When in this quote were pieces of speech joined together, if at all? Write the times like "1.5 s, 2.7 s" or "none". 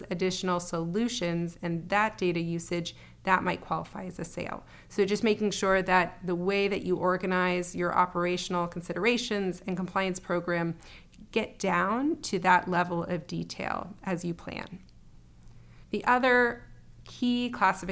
15.8 s